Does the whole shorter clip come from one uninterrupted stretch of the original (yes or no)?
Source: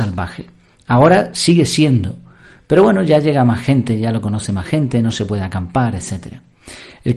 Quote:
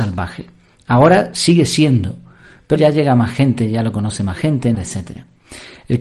no